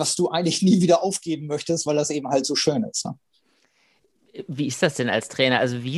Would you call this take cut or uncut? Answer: uncut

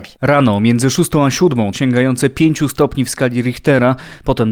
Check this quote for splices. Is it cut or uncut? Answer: cut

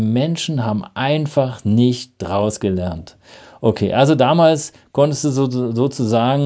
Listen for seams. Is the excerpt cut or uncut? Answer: uncut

